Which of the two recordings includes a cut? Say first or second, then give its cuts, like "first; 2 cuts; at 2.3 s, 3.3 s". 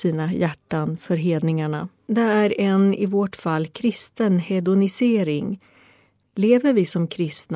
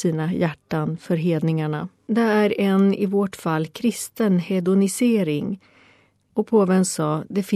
second; 1 cut; at 6.3 s